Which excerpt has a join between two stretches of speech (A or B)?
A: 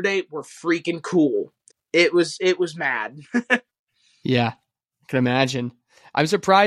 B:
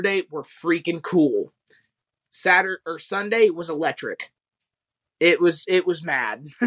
A